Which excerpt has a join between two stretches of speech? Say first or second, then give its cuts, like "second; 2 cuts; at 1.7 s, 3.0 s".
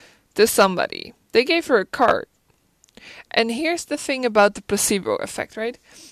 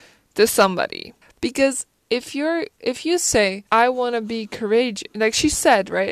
second; 2 cuts; at 1.2 s, 3.7 s